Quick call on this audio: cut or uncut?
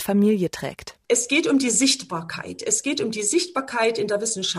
cut